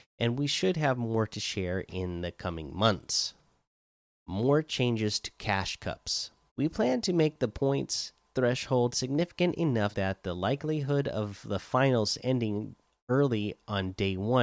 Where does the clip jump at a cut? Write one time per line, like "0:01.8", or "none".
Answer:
0:06.5
0:09.9